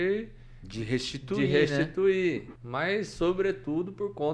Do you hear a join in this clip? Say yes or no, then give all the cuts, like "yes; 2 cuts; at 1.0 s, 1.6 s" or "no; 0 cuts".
yes; 1 cut; at 2.6 s